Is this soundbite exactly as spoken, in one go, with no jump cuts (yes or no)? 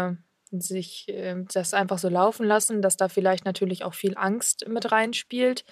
yes